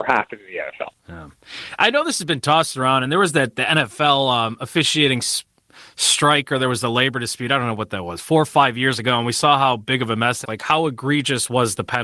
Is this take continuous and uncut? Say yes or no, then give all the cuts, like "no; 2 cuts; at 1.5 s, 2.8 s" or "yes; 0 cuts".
no; 1 cut; at 10.4 s